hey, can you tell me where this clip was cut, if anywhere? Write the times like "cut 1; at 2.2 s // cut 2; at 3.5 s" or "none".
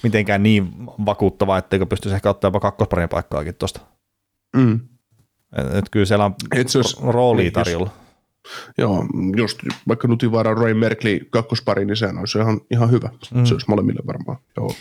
none